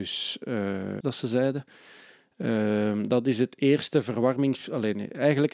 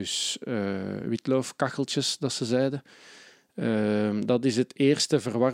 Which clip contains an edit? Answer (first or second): first